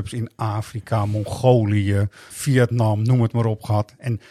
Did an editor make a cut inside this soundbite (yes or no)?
yes